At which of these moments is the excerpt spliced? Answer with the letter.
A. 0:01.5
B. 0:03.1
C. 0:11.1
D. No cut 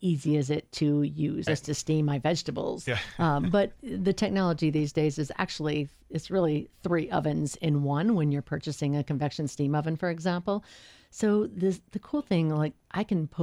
A